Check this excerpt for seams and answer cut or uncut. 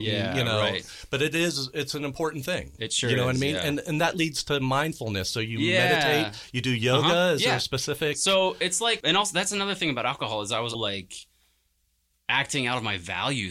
cut